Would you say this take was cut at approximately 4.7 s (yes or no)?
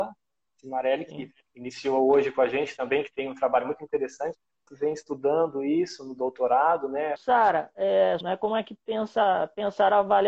yes